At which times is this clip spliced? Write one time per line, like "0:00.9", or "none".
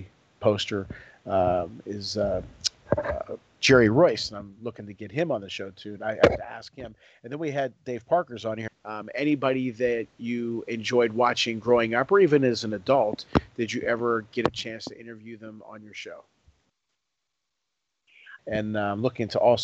0:08.7
0:18.4